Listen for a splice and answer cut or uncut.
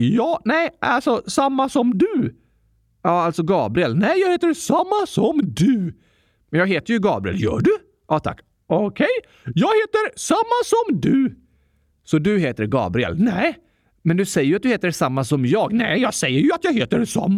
uncut